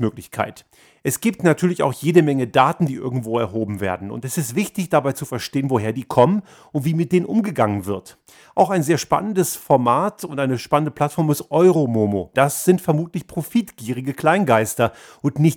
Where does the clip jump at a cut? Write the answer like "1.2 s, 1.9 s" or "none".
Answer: 12.3 s